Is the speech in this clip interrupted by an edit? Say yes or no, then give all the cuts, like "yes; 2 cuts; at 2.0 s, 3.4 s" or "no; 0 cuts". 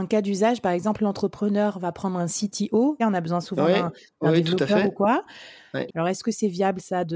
yes; 2 cuts; at 3.0 s, 5.9 s